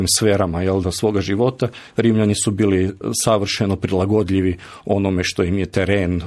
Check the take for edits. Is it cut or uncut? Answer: uncut